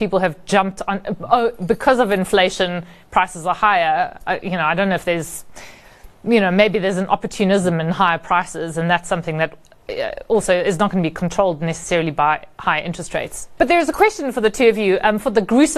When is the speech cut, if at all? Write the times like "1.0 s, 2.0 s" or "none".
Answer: 13.6 s